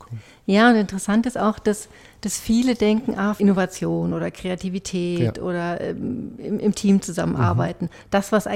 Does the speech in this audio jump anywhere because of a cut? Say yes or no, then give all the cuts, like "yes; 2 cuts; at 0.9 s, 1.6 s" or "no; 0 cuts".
yes; 1 cut; at 3.4 s